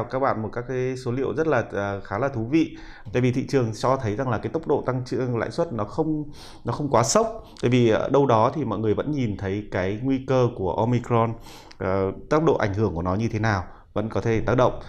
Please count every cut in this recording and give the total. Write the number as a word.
one